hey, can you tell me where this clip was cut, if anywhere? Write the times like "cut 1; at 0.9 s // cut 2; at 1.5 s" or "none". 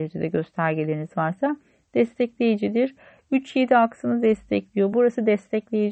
cut 1; at 4.9 s